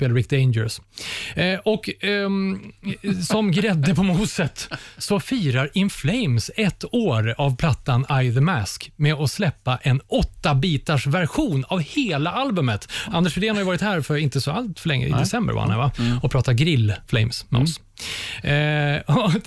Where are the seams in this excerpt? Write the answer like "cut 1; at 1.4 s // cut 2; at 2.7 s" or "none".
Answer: cut 1; at 17.0 s